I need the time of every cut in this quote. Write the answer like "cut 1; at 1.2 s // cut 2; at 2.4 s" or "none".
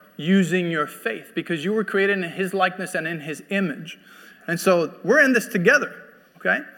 cut 1; at 4.4 s